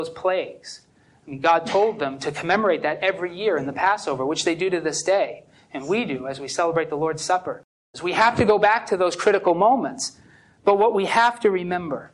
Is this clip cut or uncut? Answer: cut